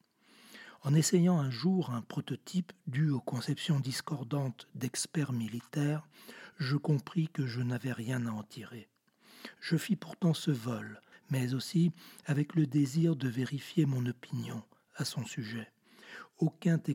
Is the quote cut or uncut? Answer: cut